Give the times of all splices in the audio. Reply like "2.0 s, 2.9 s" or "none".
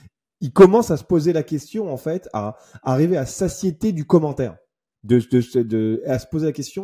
none